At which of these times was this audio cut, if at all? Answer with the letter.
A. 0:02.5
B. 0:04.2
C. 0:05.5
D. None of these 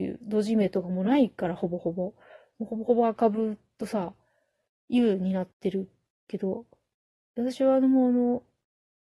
C